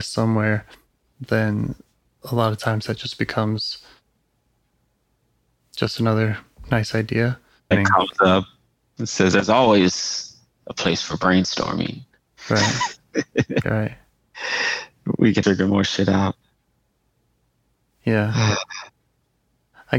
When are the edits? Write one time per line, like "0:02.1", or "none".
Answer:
0:07.7
0:13.6
0:15.4